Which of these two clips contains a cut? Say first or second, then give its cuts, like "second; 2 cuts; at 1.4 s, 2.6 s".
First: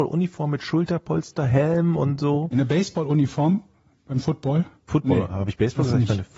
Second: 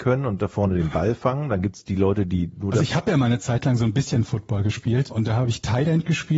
second; 1 cut; at 5.1 s